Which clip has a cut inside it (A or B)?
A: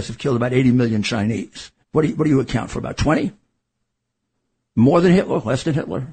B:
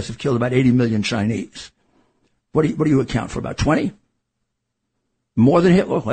A